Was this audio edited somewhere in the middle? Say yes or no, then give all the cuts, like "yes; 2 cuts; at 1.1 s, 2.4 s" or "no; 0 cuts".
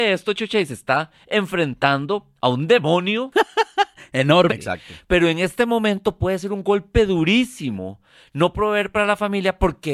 yes; 1 cut; at 4.5 s